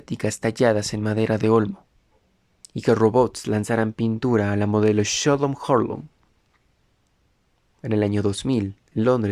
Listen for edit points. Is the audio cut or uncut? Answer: uncut